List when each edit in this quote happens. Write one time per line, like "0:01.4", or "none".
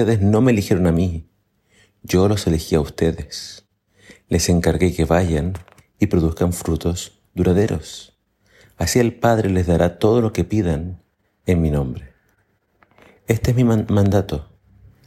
none